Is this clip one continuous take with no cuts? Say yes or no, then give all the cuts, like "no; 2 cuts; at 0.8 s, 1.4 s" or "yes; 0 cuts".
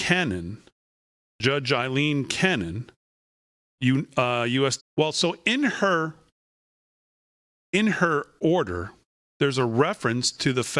no; 1 cut; at 4.8 s